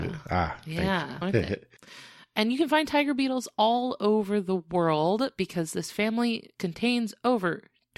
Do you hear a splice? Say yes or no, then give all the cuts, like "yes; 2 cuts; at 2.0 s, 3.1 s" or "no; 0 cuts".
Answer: yes; 1 cut; at 1.2 s